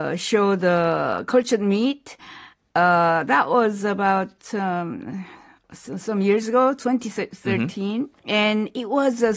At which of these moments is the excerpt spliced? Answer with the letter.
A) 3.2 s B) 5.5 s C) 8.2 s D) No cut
C